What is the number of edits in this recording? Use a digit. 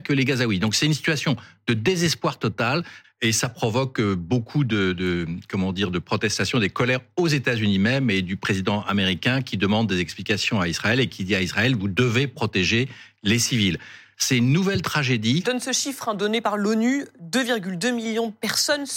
2